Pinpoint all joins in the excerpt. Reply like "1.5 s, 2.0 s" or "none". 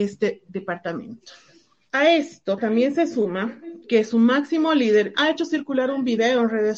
1.9 s, 5.1 s